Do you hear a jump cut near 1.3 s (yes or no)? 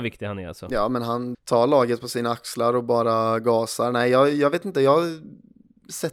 yes